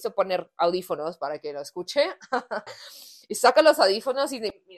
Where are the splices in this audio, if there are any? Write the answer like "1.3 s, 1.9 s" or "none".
2.7 s